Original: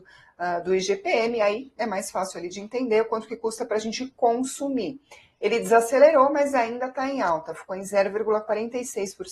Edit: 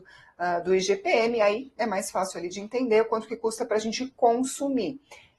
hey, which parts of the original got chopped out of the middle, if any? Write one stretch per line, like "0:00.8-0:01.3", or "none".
none